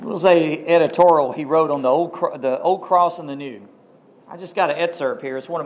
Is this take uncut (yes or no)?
yes